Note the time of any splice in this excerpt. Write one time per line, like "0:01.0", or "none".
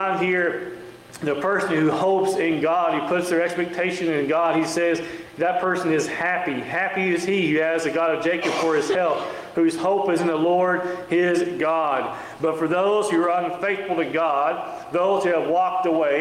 none